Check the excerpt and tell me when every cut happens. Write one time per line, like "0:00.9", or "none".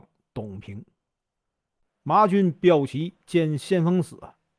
none

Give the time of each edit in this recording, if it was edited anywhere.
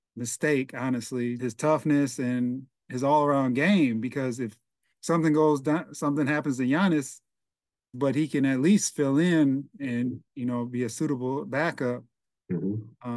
0:01.4
0:07.9

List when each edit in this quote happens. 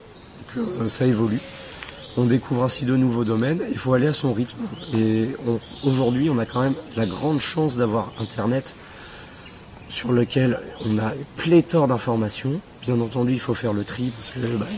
none

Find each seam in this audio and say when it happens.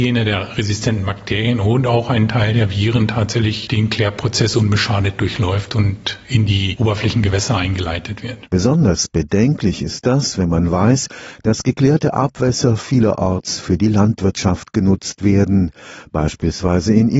none

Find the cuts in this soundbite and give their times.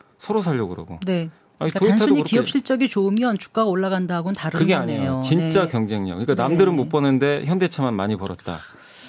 0:01.4

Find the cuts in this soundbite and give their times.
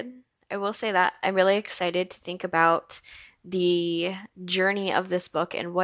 none

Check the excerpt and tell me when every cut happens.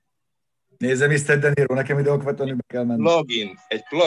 none

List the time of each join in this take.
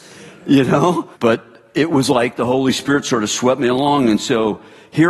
0:01.1

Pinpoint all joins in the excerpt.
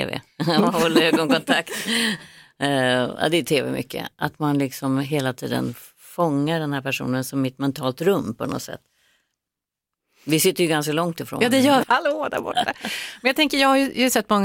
0:11.8

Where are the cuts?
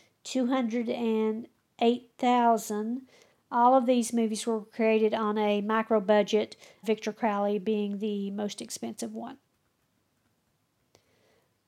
0:03.3
0:06.8

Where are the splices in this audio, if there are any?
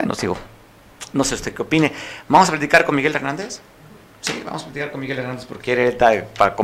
0:05.6

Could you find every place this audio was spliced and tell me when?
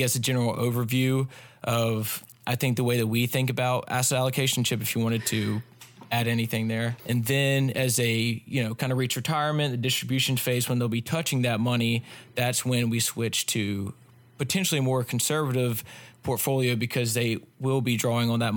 0:07.0

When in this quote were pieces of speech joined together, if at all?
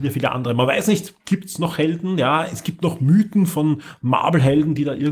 none

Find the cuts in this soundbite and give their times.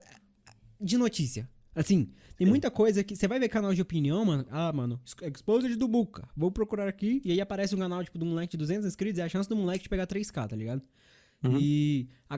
0:04.5

